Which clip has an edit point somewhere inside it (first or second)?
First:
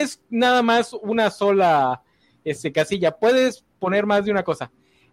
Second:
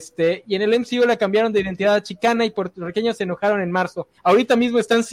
second